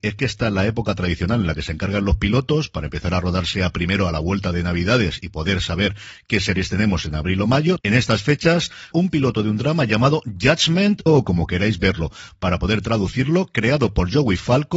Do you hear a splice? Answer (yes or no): yes